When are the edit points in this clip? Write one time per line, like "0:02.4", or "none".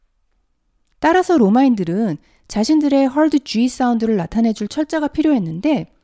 0:00.9